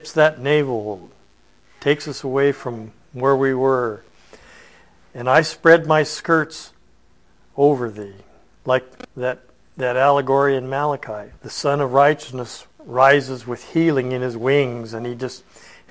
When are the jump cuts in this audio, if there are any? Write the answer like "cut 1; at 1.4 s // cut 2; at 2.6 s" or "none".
cut 1; at 8.5 s // cut 2; at 11.4 s // cut 3; at 12.7 s